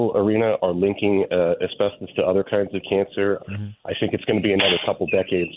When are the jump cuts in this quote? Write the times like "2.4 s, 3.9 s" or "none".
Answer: 3.4 s